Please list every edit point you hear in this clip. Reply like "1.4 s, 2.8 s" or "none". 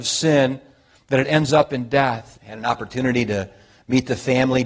2.3 s